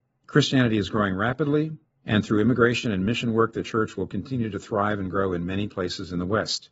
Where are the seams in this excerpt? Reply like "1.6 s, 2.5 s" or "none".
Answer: none